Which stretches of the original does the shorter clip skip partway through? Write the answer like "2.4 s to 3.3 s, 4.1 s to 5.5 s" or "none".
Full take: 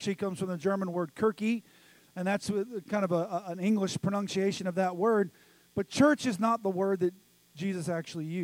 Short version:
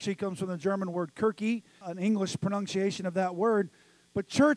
1.8 s to 3.4 s